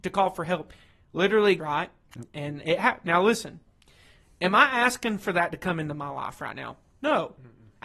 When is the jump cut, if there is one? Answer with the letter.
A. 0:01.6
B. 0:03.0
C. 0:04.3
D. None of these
A